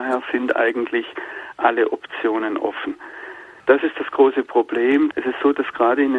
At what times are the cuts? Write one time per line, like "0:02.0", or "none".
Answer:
0:03.6
0:05.1

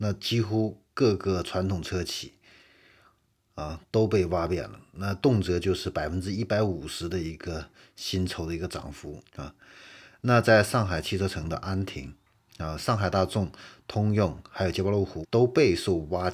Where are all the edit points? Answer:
0:09.3
0:15.2

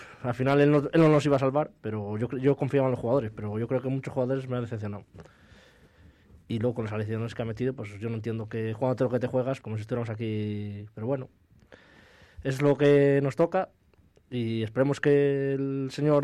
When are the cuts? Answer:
0:09.6

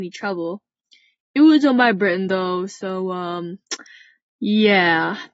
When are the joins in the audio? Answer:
none

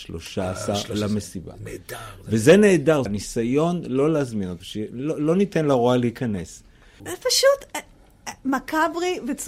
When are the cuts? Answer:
0:03.1
0:04.6
0:07.0

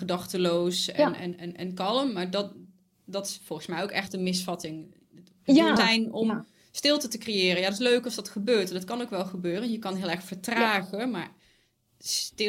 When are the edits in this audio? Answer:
0:05.8

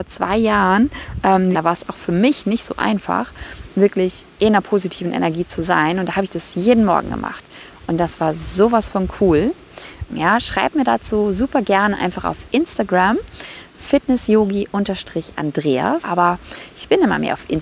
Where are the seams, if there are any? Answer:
0:01.5
0:10.1
0:16.0

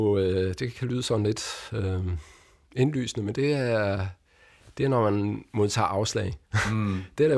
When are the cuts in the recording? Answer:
none

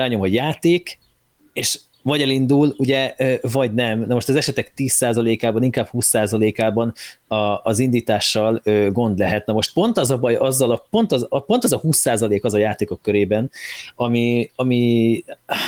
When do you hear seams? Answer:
none

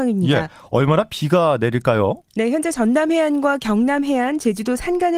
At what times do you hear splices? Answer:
0:02.3

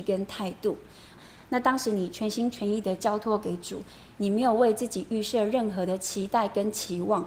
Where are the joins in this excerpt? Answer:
0:01.2

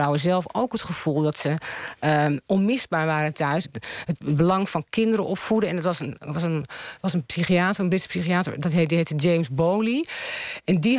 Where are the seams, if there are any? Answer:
0:03.6

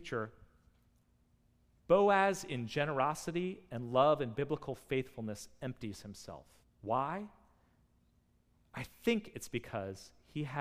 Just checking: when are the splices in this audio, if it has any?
0:06.6

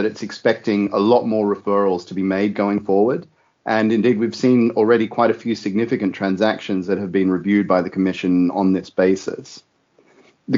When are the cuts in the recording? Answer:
none

